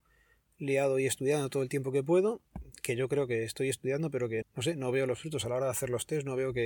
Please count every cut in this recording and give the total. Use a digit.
1